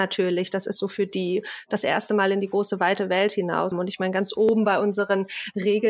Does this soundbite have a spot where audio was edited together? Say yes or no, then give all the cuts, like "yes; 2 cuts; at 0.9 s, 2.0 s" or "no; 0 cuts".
yes; 1 cut; at 3.7 s